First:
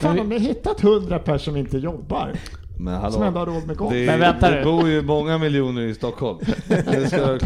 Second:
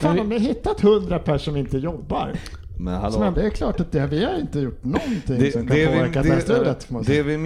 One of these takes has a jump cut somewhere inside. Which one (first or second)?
second